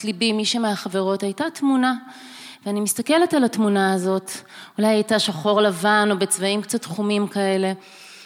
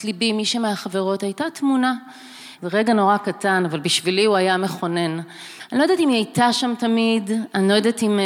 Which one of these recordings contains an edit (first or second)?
second